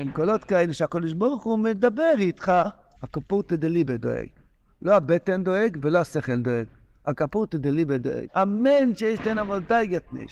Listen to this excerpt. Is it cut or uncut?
cut